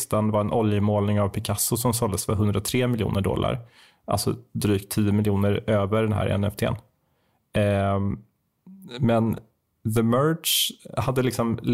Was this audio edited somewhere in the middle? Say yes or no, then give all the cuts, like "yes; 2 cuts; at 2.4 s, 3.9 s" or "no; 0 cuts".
no; 0 cuts